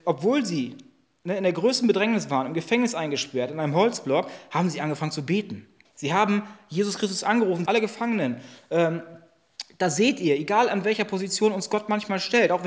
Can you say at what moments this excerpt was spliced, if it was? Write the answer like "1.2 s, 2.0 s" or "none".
5.8 s, 7.7 s